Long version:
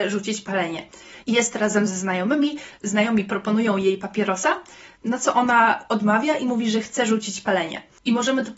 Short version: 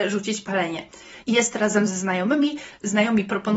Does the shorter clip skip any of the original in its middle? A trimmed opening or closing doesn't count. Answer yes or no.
no